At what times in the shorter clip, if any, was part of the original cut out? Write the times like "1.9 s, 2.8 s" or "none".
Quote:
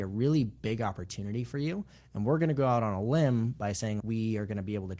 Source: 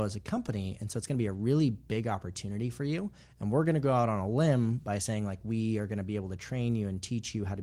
4.0 s